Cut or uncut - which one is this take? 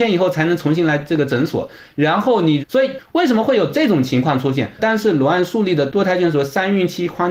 cut